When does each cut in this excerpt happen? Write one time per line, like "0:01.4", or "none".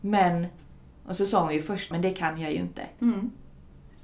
0:01.9
0:03.0

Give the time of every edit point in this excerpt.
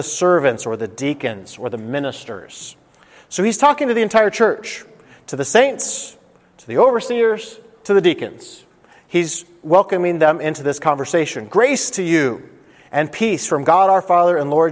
none

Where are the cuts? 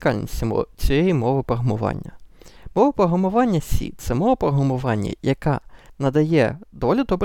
none

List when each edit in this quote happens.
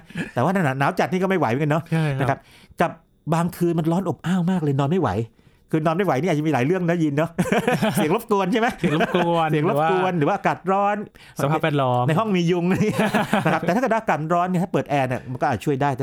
none

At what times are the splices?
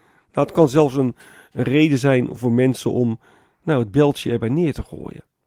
none

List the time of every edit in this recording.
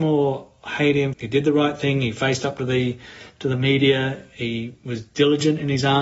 0:01.1

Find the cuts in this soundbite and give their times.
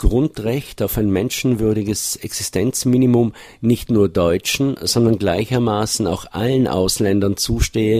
none

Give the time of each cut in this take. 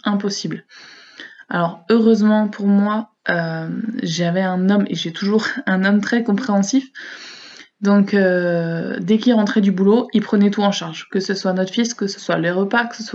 none

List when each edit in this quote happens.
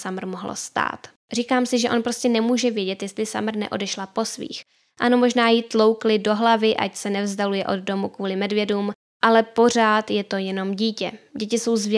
none

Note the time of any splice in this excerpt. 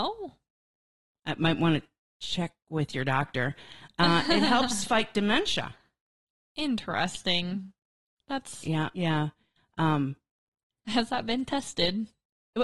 0:08.9

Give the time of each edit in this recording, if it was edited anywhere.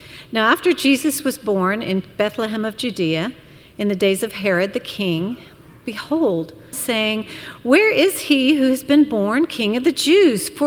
0:06.7

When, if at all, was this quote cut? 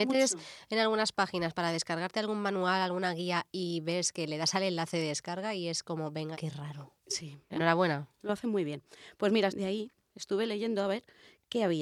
0:06.3
0:07.5
0:09.5

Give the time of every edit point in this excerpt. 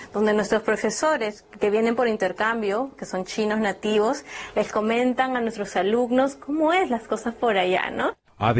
none

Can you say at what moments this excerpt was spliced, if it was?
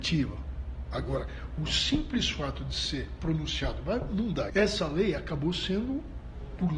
0:04.5

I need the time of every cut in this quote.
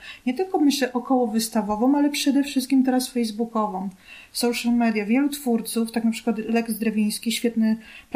none

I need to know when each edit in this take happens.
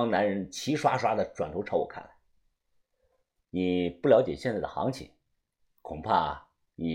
0:03.4

